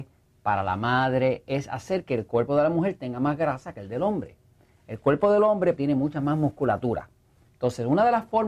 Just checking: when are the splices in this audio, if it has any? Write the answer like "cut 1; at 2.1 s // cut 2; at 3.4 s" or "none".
cut 1; at 5.8 s // cut 2; at 7.5 s

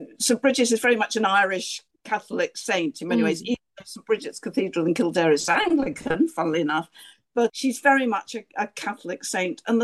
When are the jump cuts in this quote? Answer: none

